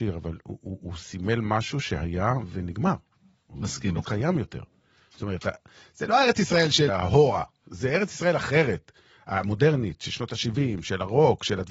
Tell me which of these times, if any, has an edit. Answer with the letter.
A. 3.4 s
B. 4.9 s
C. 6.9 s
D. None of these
C